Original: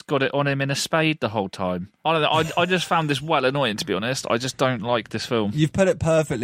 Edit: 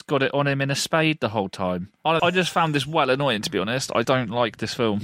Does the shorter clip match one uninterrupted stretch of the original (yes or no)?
no